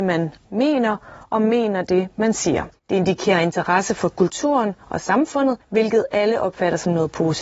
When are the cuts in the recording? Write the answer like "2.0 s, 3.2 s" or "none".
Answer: 2.7 s